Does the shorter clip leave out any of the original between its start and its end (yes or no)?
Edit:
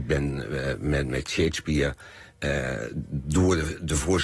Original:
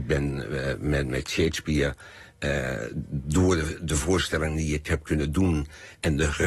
no